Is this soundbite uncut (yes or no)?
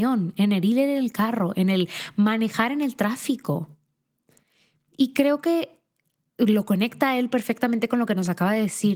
yes